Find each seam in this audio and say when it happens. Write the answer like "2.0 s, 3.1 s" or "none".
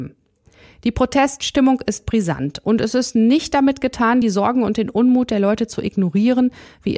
none